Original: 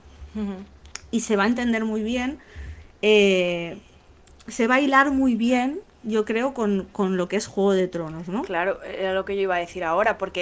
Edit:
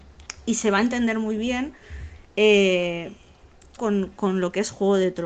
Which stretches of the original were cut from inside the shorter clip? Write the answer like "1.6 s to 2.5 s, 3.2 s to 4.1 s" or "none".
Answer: 4.4 s to 6.5 s